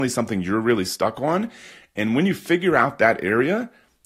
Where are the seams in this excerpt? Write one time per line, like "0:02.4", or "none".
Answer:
none